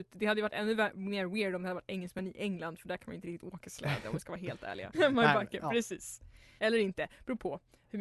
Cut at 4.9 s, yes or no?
yes